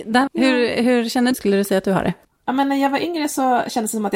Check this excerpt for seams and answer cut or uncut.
cut